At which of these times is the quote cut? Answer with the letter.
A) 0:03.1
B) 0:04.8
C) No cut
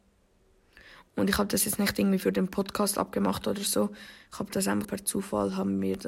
B